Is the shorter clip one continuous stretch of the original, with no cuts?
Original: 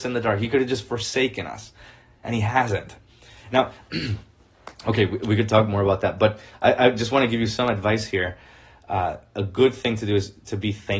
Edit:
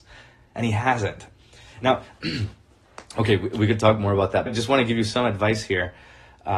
no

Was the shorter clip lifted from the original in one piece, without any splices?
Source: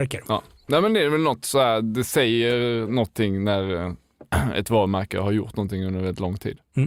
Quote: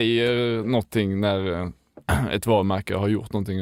yes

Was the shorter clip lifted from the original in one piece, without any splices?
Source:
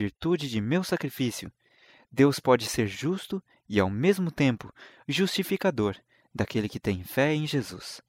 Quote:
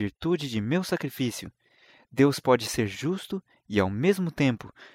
yes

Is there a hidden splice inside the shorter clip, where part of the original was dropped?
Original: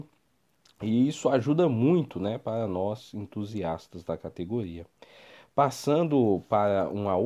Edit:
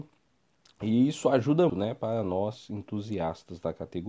yes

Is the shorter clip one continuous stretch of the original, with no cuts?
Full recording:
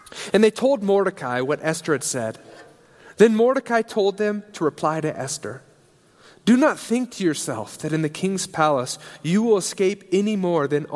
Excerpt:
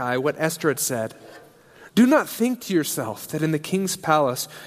no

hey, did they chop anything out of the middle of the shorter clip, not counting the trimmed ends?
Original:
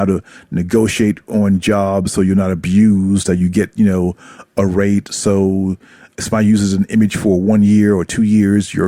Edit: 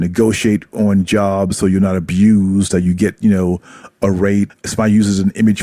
yes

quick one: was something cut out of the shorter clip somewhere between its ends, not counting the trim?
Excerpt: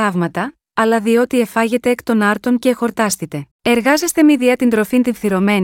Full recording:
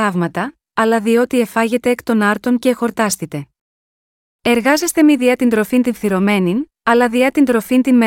yes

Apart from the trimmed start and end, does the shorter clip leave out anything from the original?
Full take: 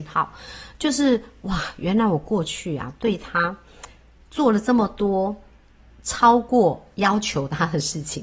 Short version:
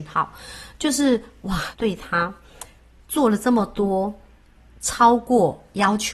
yes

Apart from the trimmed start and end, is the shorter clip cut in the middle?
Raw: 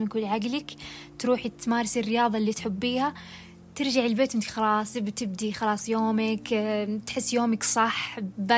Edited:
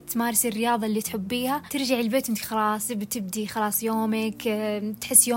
yes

